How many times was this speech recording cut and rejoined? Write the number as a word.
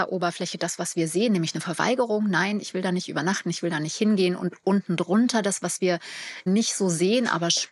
one